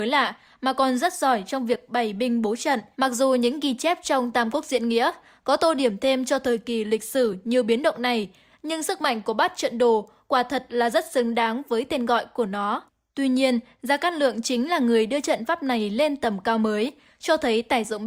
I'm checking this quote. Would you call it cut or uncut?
cut